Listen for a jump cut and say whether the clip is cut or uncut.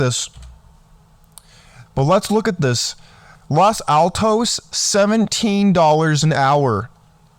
cut